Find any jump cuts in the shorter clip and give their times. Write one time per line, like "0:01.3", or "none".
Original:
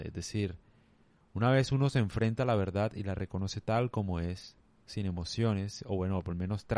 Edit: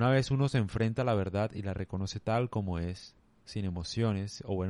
none